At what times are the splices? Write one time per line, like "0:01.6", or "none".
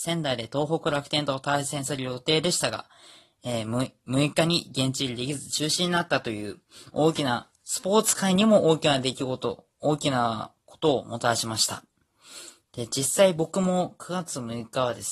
none